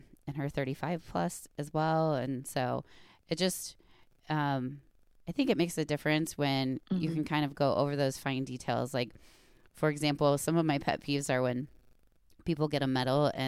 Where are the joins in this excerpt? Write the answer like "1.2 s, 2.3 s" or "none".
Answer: none